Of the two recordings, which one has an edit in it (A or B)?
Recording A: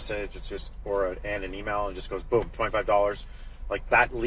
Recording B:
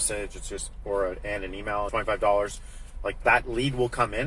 B